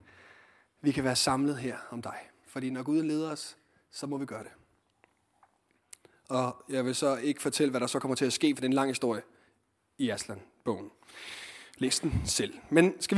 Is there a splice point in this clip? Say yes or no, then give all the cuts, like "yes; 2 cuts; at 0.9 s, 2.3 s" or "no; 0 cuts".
yes; 1 cut; at 2.4 s